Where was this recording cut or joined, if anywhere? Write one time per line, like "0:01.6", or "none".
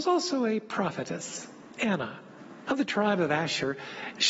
0:02.7